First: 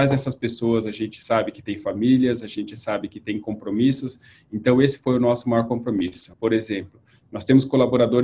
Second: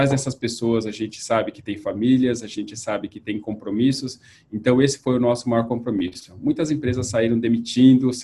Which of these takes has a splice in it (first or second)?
first